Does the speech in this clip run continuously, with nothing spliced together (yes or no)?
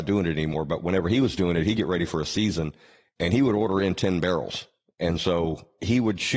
yes